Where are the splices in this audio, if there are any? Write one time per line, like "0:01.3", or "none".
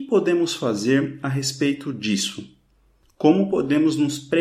none